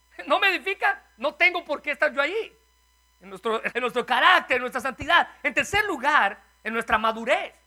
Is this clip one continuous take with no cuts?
no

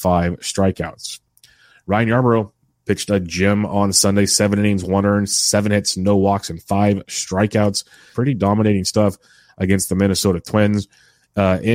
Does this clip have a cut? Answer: yes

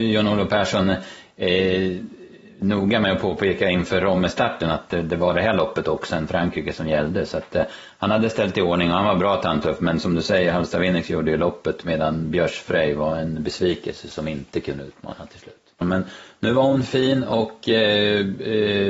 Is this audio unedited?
no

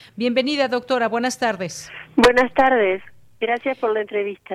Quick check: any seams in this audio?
no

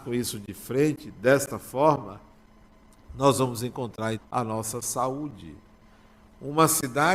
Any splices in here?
yes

